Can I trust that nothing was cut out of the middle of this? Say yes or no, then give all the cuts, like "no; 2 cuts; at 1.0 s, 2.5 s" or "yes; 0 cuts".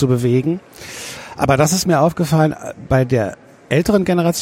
yes; 0 cuts